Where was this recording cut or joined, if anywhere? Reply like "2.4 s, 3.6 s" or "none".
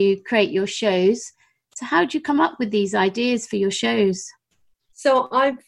none